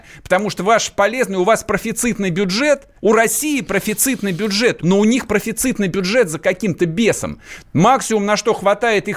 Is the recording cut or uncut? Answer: cut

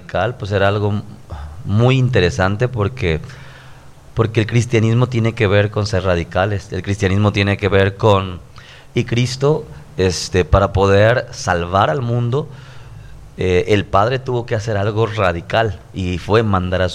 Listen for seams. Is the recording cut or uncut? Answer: cut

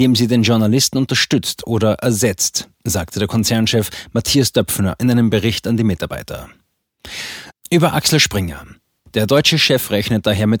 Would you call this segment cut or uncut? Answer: cut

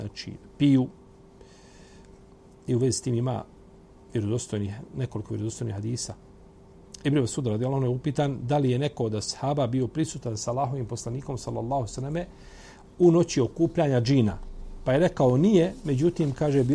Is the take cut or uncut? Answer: uncut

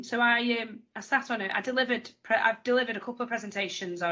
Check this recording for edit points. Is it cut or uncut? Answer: uncut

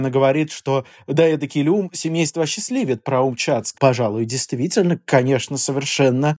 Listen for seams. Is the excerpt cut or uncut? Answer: cut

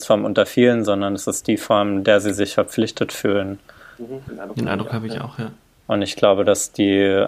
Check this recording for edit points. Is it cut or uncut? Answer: cut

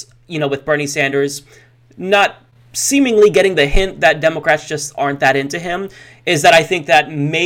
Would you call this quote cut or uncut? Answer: uncut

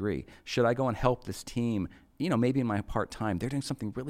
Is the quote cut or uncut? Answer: uncut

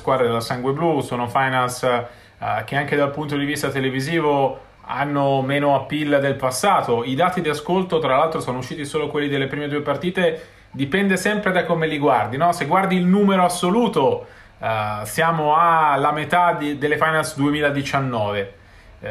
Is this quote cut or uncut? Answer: uncut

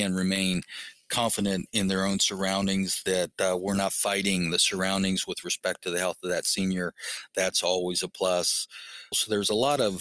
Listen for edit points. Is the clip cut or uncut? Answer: cut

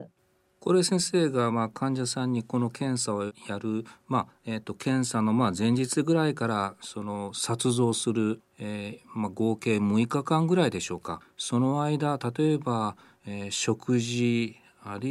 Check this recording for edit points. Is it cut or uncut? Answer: uncut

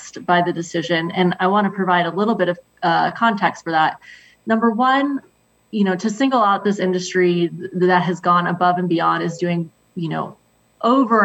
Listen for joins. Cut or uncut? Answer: uncut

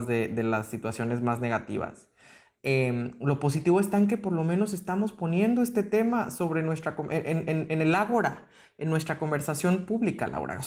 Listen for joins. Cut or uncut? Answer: uncut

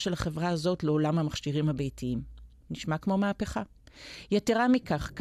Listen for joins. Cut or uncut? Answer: uncut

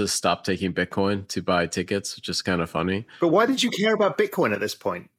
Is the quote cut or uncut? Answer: uncut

